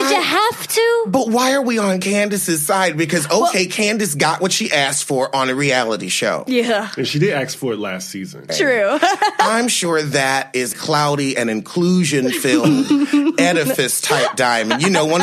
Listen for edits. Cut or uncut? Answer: cut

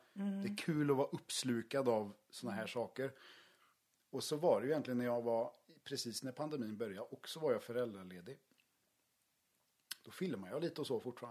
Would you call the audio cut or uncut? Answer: uncut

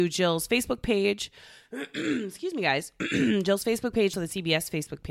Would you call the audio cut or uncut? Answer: cut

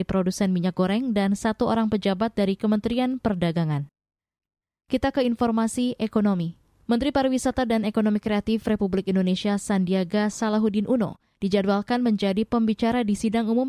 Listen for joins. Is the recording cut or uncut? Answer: uncut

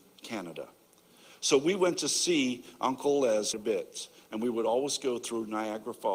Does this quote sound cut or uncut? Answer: cut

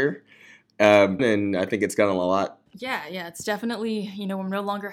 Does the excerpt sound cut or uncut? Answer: cut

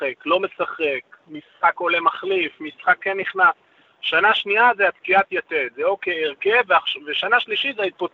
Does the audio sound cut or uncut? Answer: uncut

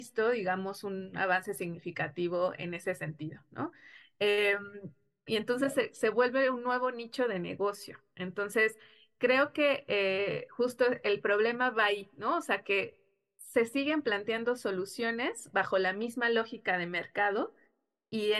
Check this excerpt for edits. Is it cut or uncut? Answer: cut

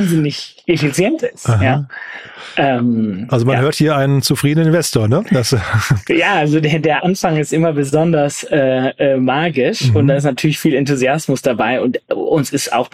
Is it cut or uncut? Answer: uncut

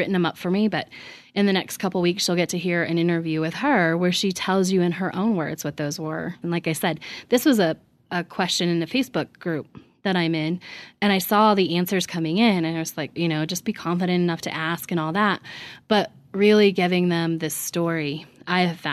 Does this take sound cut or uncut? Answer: cut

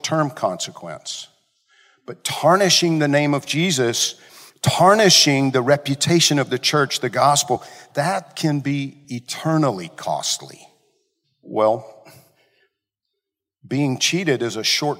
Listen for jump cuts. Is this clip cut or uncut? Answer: cut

